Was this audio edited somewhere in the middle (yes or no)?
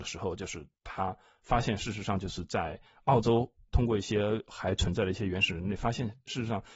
no